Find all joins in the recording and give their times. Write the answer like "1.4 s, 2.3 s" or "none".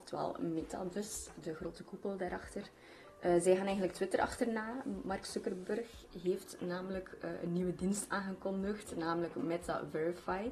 none